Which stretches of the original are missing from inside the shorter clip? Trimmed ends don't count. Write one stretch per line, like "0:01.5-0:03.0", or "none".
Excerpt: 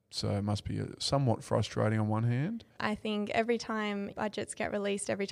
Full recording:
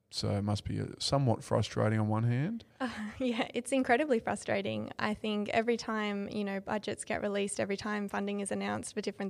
0:02.8-0:04.9
0:06.3-0:06.6